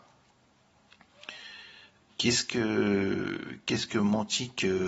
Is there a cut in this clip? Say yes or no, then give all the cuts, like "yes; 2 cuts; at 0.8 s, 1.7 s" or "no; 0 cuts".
no; 0 cuts